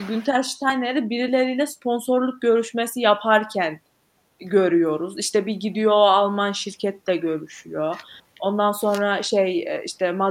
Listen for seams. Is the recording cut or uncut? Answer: uncut